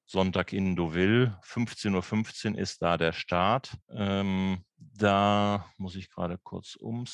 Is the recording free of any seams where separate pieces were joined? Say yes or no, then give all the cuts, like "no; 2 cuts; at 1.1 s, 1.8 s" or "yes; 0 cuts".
no; 1 cut; at 3.8 s